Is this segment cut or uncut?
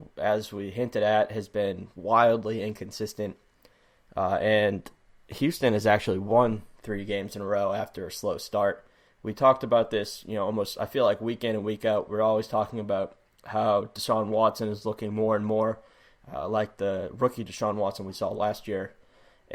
uncut